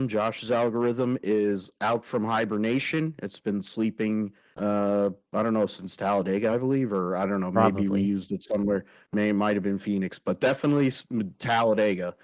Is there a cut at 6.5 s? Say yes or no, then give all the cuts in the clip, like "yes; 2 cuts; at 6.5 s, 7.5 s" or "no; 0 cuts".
no; 0 cuts